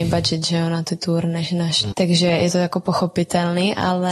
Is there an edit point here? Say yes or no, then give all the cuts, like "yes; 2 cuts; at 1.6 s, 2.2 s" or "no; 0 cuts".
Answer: yes; 1 cut; at 1.9 s